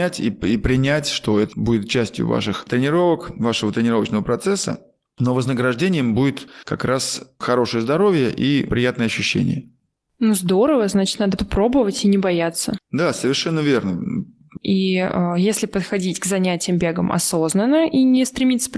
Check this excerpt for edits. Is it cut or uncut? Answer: cut